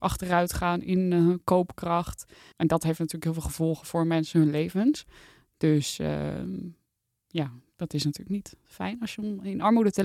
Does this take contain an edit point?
yes; 1 cut; at 2.5 s

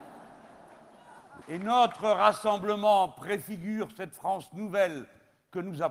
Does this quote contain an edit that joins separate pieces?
yes; 1 cut; at 1.4 s

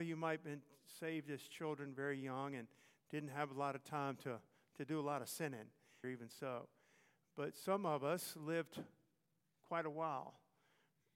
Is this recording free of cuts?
no; 1 cut; at 6.0 s

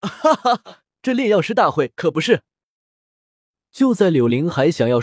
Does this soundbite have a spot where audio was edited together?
yes; 1 cut; at 0.9 s

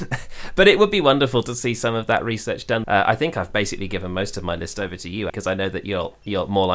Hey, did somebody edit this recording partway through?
yes; 2 cuts; at 2.8 s, 5.3 s

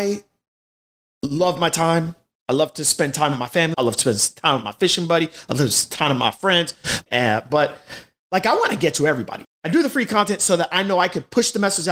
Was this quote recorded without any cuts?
no; 3 cuts; at 3.7 s, 7.1 s, 9.4 s

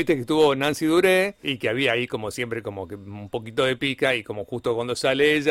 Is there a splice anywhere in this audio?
yes; 1 cut; at 1.4 s

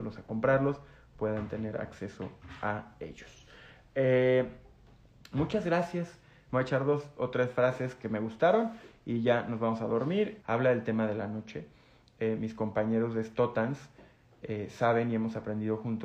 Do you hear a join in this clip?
yes; 2 cuts; at 6.5 s, 10.4 s

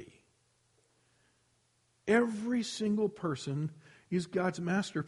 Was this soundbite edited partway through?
no; 0 cuts

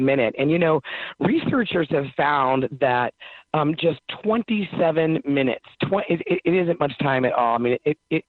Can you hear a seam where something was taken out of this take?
no; 0 cuts

